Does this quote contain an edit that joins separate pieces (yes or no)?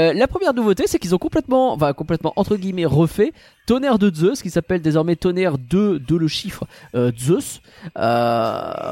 no